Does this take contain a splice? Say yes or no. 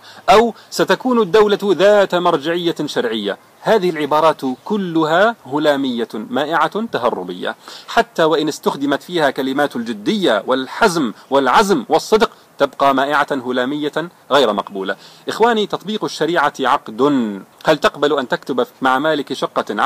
yes